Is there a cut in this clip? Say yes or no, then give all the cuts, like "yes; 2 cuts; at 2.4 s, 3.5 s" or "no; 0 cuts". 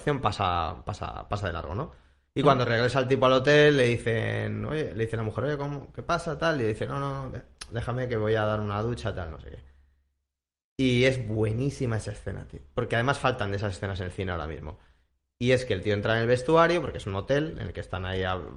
no; 0 cuts